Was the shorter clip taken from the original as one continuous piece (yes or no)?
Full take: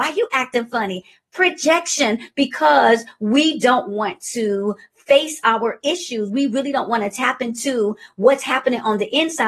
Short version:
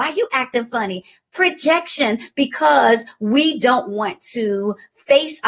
yes